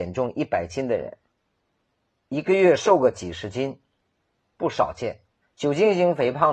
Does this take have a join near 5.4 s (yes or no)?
yes